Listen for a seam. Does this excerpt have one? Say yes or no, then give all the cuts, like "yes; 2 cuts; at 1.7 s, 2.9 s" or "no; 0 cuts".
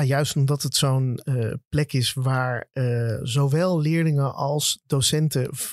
no; 0 cuts